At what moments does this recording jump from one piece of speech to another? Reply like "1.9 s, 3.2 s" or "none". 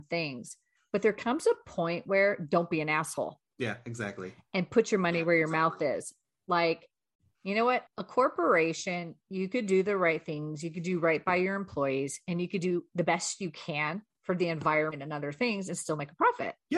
7.9 s